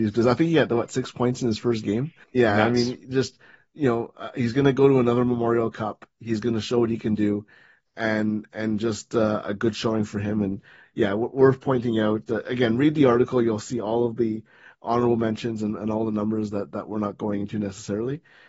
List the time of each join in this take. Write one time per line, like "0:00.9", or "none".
0:02.2